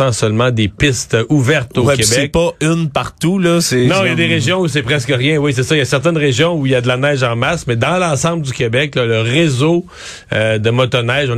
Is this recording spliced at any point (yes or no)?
no